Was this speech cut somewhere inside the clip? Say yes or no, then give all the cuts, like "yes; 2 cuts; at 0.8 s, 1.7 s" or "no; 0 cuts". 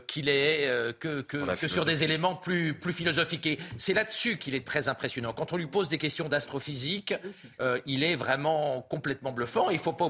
no; 0 cuts